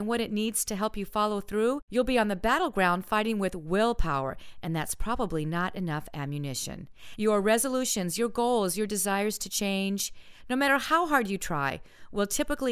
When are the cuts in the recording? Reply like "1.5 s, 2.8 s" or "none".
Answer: 7.1 s